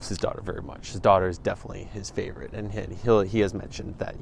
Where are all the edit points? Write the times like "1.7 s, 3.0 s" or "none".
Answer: none